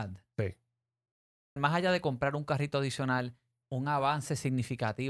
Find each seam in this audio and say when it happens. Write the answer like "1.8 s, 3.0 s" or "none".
1.6 s, 3.6 s